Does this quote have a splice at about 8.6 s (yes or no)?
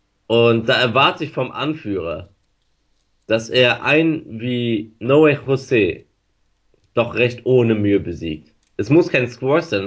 no